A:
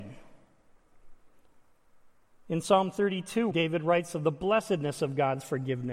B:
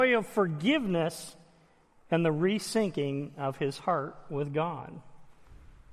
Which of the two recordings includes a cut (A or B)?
A